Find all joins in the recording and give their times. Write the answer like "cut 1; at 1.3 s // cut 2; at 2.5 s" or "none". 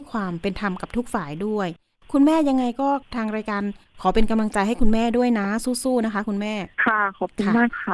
cut 1; at 6.7 s

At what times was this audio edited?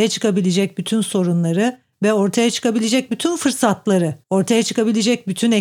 cut 1; at 4.2 s

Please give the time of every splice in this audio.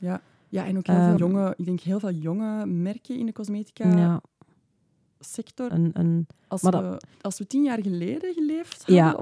cut 1; at 1.2 s // cut 2; at 5.7 s // cut 3; at 7.1 s

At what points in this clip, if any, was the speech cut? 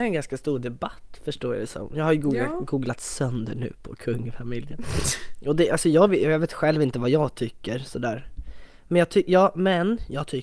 none

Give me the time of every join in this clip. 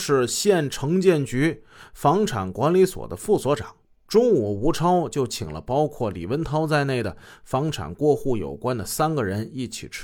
cut 1; at 4.1 s

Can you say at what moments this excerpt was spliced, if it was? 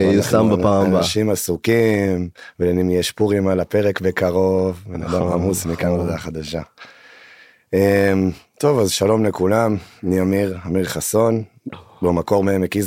none

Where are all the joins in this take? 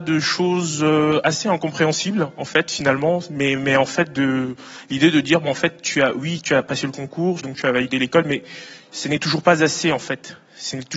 cut 1; at 7.4 s

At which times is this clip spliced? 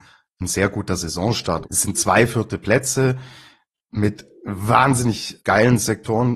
cut 1; at 1.6 s // cut 2; at 5.4 s

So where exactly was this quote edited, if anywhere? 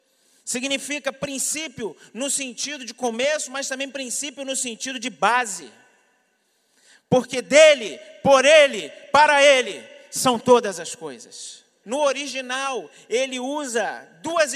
cut 1; at 11.8 s

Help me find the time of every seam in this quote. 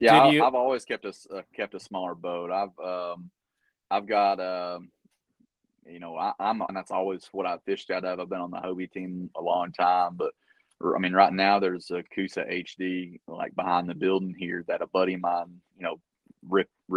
cut 1; at 6.7 s

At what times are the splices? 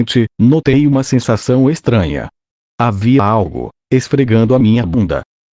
cut 1; at 3.8 s

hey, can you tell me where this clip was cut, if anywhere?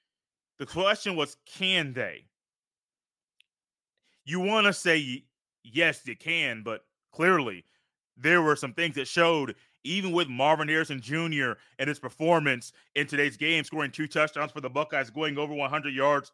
none

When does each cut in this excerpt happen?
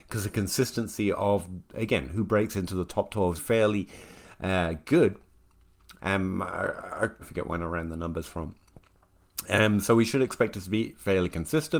cut 1; at 3.4 s // cut 2; at 6.0 s // cut 3; at 7.2 s

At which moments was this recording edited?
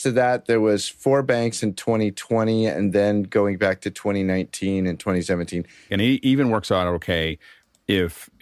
cut 1; at 5.9 s

